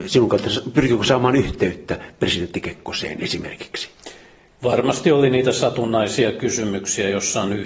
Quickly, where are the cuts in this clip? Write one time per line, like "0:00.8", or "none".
none